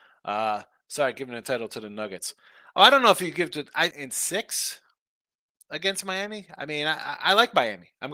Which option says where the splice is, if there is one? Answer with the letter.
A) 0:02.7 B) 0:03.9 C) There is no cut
B